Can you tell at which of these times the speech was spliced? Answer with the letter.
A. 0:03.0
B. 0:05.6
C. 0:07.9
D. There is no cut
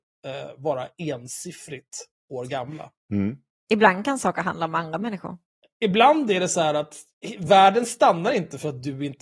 A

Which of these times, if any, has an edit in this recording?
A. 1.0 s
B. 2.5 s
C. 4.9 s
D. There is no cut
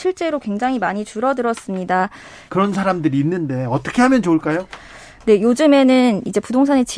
B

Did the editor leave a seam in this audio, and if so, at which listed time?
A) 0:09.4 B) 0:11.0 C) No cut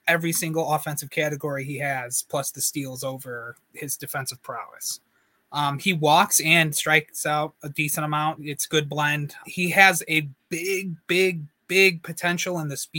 A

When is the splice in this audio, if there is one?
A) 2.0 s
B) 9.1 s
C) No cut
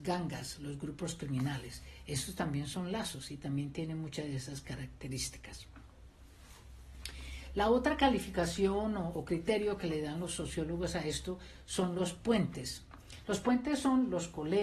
B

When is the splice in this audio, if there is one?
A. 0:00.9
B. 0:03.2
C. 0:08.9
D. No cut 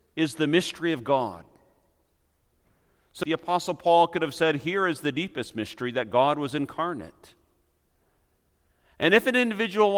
B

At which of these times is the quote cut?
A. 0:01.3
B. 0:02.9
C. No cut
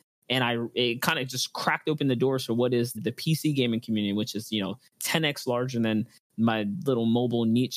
B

